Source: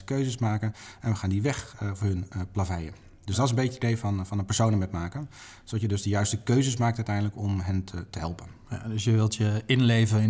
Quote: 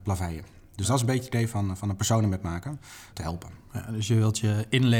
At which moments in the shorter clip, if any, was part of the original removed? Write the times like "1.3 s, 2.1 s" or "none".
3.1 s